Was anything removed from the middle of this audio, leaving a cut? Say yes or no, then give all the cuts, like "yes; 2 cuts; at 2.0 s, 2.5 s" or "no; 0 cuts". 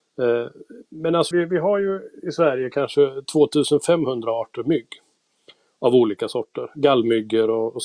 yes; 1 cut; at 1.3 s